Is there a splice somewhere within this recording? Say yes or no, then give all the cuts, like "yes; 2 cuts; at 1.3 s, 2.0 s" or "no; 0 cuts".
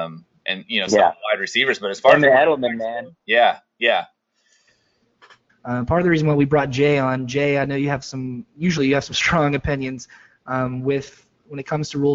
yes; 1 cut; at 5.5 s